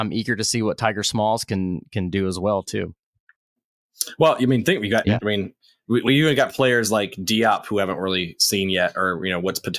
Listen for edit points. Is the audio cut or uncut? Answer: uncut